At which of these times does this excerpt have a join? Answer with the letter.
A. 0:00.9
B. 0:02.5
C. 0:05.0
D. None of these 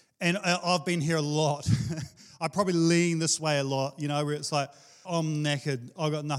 C